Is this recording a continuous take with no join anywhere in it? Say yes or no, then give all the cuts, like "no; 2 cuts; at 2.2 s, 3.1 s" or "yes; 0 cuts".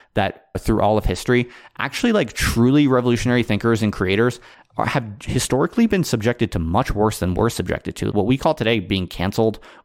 yes; 0 cuts